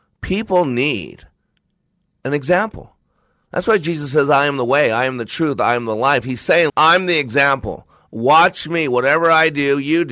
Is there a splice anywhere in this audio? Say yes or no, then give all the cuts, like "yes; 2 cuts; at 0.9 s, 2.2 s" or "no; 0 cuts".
yes; 1 cut; at 6.7 s